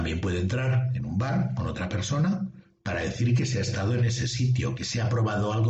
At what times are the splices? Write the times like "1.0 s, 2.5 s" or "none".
4.8 s